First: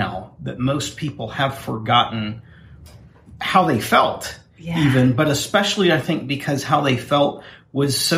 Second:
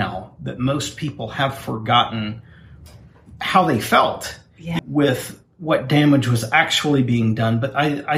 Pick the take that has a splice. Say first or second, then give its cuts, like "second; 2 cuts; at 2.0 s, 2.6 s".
second; 1 cut; at 4.8 s